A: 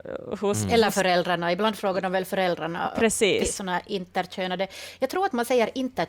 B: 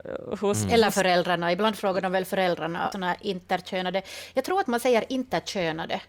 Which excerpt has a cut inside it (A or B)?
B